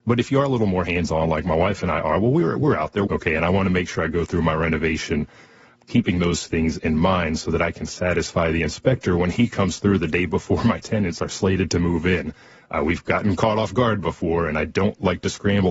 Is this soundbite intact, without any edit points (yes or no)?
no